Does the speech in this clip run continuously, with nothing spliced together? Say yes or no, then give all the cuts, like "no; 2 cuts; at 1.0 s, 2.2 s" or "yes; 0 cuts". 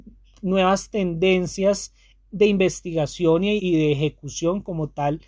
no; 1 cut; at 3.6 s